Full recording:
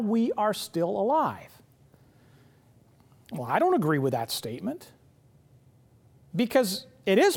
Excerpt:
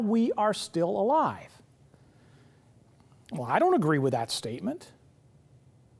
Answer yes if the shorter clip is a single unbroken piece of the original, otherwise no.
yes